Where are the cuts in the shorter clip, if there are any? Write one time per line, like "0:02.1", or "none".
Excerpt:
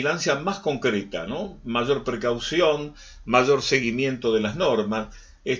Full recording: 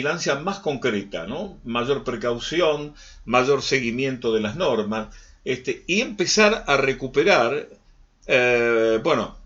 none